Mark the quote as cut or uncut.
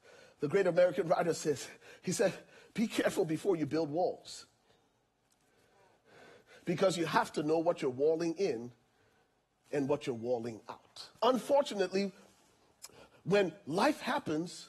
cut